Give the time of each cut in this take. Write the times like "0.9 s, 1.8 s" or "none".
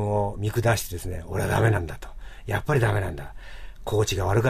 none